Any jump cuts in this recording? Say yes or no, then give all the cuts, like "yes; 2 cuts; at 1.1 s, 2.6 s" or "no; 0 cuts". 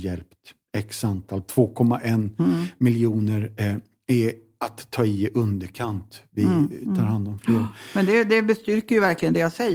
no; 0 cuts